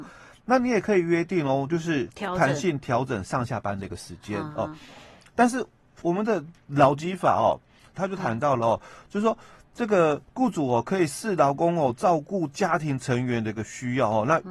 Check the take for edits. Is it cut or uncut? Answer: cut